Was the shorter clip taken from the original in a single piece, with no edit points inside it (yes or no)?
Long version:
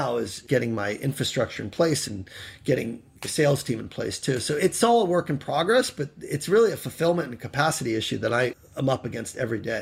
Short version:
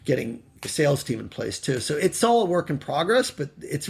yes